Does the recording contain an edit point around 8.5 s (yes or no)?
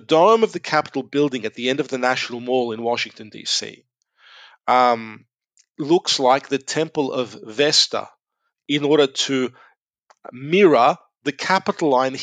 yes